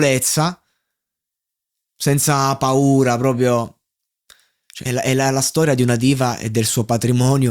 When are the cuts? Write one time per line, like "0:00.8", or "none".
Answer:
0:04.9